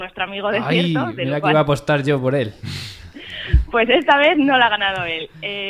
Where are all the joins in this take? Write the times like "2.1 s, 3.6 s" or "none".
none